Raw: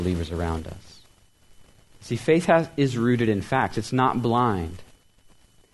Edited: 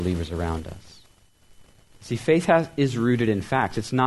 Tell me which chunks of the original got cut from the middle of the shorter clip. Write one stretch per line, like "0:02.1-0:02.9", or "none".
none